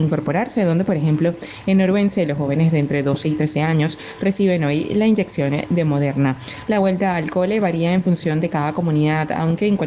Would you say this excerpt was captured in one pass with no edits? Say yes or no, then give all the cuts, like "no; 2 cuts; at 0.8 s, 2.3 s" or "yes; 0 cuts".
no; 1 cut; at 6.7 s